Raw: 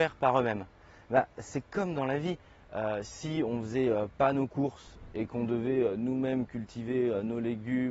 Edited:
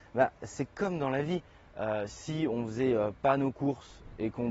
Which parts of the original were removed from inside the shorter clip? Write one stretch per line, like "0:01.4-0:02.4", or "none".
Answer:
none